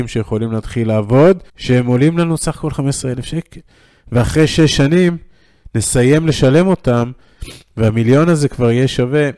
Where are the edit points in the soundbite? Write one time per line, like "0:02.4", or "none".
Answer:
0:01.5